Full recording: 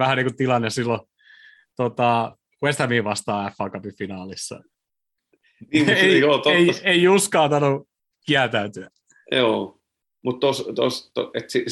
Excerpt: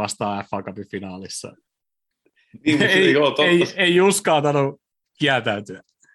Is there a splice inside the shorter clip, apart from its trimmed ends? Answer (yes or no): no